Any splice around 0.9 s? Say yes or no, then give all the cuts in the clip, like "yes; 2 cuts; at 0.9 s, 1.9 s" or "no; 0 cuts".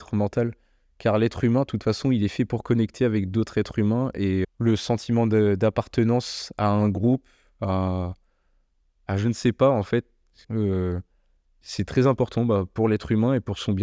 no; 2 cuts; at 4.4 s, 10.4 s